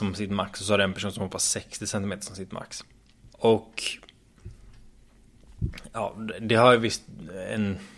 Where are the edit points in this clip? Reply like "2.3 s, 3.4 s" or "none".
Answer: 3.3 s